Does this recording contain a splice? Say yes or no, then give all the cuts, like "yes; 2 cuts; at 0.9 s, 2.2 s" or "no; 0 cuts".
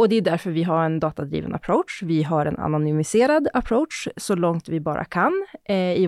no; 0 cuts